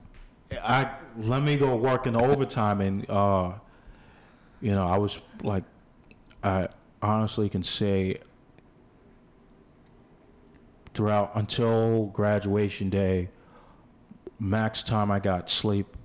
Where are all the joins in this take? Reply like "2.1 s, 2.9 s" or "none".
none